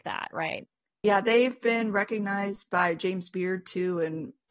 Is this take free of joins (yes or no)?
no